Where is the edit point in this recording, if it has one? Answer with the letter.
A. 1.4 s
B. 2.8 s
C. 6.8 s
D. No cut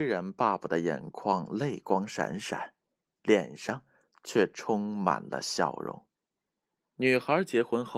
D